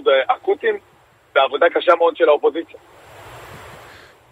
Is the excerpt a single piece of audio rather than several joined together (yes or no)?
yes